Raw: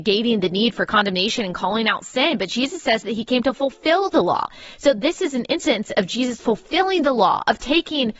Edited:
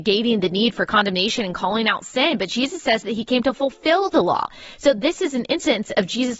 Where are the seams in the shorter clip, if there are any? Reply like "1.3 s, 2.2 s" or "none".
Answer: none

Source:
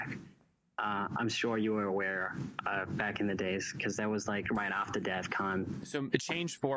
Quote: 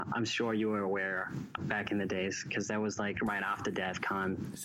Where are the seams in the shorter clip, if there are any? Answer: 1.6 s

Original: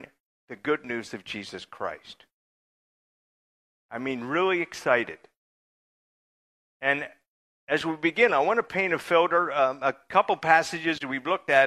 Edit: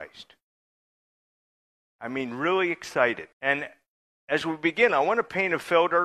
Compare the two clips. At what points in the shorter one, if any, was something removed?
3.3 s

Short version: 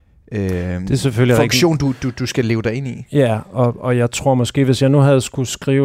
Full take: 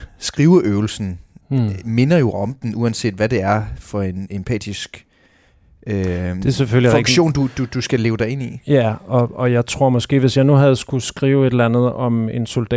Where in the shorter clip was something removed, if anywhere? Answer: none

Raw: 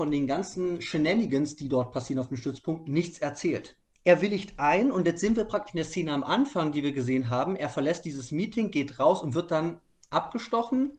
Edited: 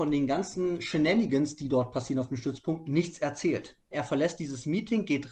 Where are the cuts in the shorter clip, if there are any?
3.9 s

